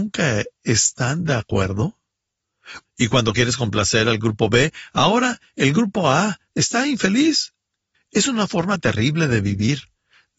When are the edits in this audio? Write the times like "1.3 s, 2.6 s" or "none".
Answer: 2.8 s, 7.9 s